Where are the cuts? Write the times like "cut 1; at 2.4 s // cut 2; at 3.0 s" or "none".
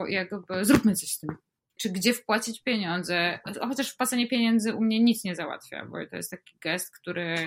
cut 1; at 1.8 s